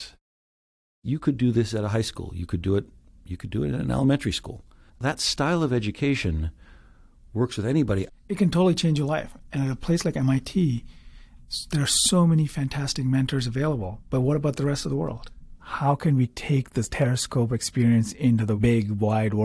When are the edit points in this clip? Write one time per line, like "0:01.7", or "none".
0:04.9
0:08.1